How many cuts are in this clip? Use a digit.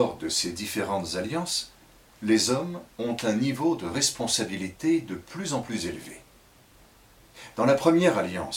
0